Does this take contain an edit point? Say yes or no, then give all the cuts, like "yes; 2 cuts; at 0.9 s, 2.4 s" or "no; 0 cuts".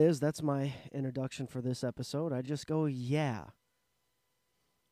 no; 0 cuts